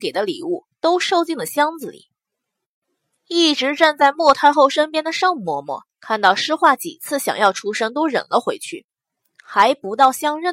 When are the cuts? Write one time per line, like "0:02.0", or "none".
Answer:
none